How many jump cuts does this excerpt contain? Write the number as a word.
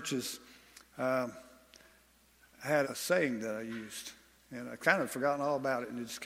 one